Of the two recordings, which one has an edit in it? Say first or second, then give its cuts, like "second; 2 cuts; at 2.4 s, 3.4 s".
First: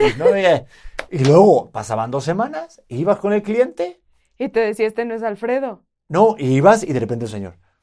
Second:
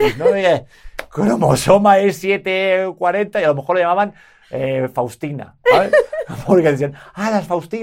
first; 1 cut; at 1.1 s